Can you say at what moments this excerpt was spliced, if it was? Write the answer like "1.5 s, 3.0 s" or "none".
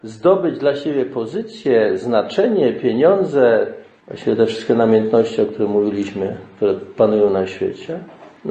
none